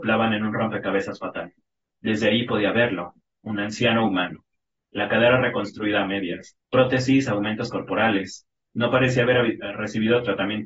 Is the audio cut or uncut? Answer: cut